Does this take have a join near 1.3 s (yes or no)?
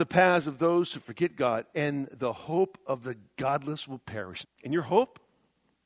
no